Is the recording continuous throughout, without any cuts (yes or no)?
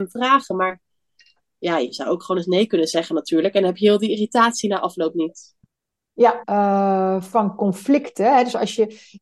no